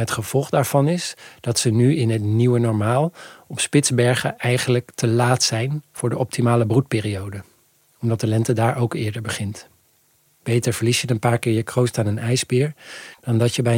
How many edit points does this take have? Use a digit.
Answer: 1